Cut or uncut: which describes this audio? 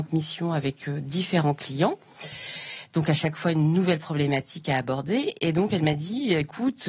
uncut